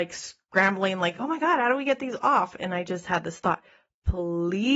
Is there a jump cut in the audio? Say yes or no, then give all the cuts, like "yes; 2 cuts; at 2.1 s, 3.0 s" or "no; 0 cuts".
no; 0 cuts